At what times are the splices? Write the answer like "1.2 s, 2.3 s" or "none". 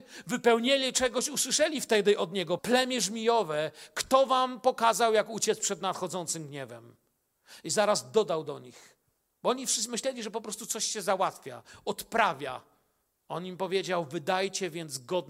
2.6 s